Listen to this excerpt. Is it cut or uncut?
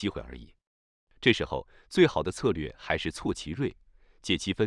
uncut